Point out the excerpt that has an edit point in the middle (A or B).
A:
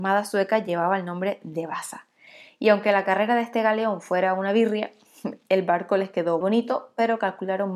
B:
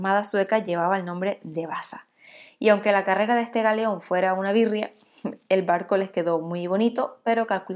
A